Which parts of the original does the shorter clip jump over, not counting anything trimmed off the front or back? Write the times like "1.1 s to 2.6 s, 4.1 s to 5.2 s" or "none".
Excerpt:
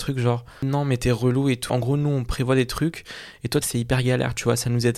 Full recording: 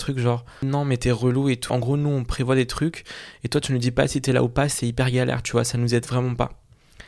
3.6 s to 4.7 s